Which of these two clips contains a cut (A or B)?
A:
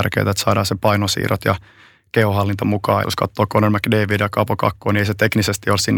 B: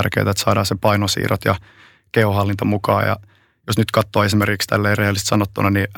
A